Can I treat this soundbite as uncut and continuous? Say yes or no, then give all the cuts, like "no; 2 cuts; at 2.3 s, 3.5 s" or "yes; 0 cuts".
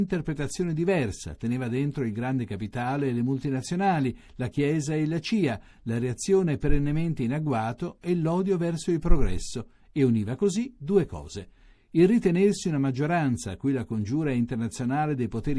yes; 0 cuts